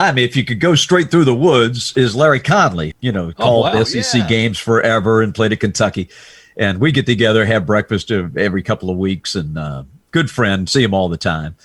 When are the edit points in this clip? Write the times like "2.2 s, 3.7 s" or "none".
2.9 s